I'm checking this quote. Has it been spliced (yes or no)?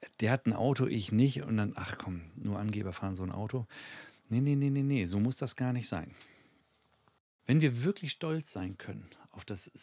no